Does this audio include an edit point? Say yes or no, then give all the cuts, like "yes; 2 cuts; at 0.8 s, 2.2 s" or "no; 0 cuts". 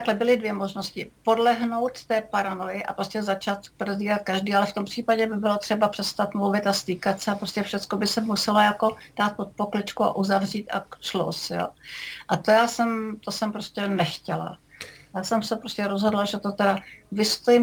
no; 0 cuts